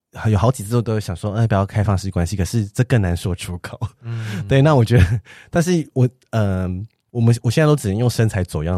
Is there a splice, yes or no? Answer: yes